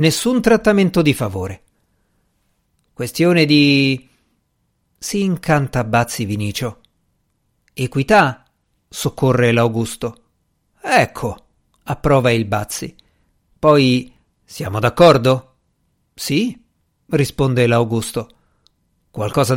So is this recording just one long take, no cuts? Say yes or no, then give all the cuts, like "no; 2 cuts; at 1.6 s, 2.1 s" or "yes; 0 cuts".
yes; 0 cuts